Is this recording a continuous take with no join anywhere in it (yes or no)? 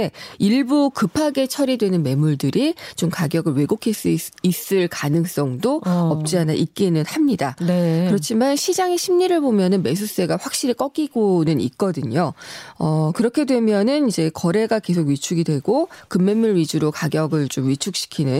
yes